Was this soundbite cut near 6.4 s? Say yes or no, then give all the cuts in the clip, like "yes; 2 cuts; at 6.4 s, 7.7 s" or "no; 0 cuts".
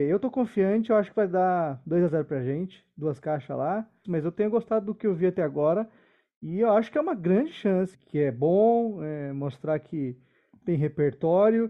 no; 2 cuts; at 4.0 s, 7.9 s